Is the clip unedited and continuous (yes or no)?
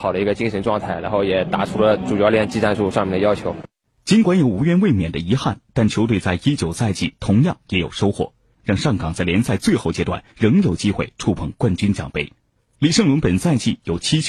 no